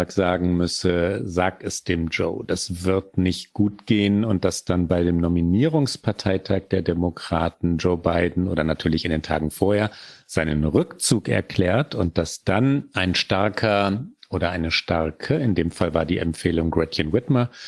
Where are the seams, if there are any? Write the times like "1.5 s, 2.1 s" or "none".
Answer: none

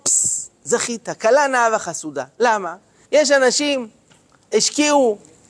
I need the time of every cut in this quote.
3.0 s

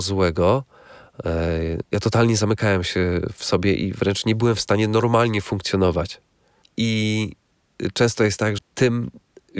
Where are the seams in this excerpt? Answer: 6.6 s, 8.6 s

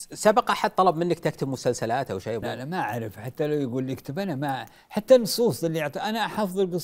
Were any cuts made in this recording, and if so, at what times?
2.4 s

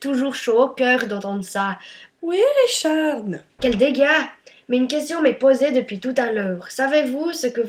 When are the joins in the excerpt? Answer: 2.1 s, 3.6 s

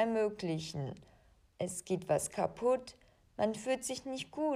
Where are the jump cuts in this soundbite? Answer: 1.5 s

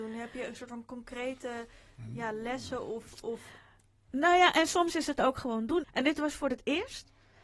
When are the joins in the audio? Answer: 5.8 s

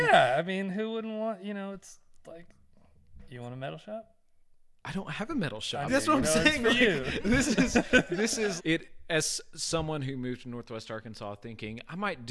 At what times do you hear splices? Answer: 5.9 s, 8.6 s

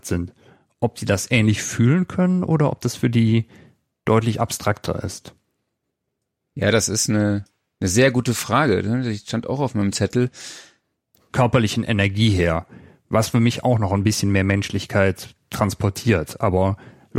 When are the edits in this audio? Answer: 11.3 s

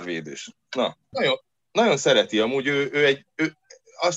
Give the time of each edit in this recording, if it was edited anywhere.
1.1 s

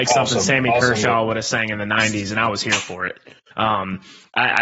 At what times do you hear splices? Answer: 3.5 s

